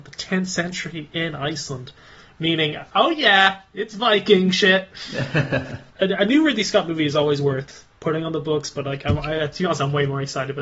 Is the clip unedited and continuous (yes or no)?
yes